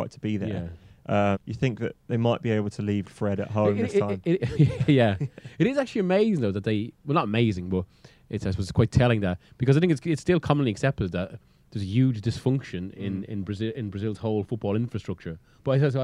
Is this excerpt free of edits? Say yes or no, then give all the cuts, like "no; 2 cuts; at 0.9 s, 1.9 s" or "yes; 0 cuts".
no; 2 cuts; at 1.3 s, 3.0 s